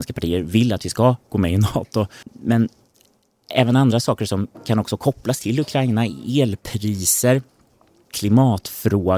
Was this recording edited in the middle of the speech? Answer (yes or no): yes